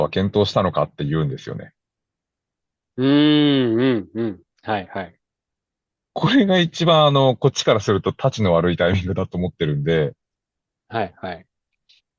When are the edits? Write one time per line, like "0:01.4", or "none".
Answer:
none